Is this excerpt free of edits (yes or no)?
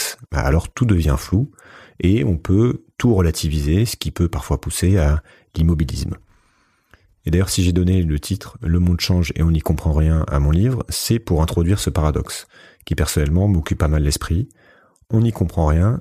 yes